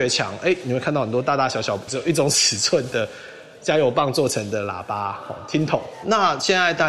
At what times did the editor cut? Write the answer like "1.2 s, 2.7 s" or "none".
1.9 s